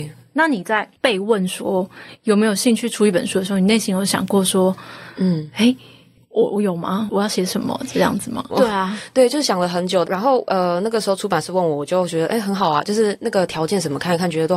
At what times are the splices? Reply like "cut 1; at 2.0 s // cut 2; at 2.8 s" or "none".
cut 1; at 8.5 s // cut 2; at 10.0 s